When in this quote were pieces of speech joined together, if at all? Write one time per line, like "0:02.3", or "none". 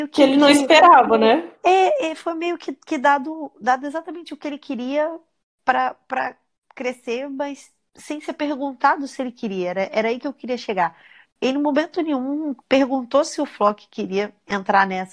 0:11.2
0:12.6